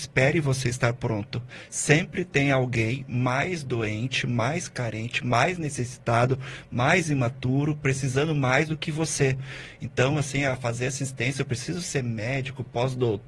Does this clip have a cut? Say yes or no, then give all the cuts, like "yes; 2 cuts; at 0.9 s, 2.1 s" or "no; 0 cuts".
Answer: no; 0 cuts